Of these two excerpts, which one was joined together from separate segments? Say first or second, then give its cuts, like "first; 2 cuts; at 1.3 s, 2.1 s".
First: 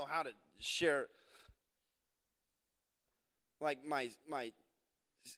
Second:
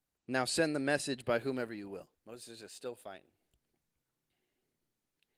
second; 1 cut; at 2.1 s